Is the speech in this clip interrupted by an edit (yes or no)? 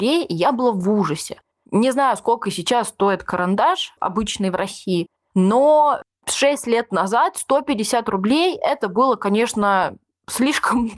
no